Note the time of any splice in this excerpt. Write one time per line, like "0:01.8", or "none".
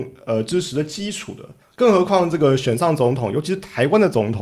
0:01.6